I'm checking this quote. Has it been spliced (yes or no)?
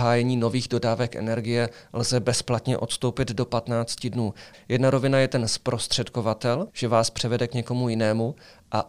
yes